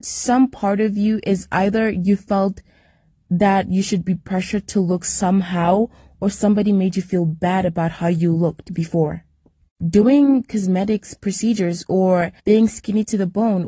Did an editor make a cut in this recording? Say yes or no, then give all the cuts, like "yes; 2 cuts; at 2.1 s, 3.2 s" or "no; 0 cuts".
yes; 2 cuts; at 9.8 s, 12.4 s